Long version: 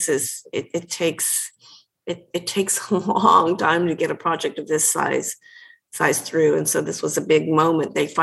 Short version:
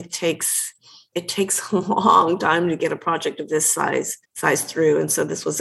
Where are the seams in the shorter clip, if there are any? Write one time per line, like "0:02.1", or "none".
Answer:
0:01.1
0:04.2